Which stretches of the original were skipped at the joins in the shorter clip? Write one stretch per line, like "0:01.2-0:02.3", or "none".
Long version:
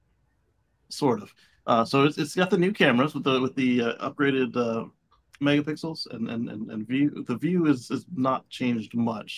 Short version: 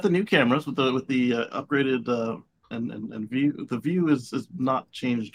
0:05.2-0:06.3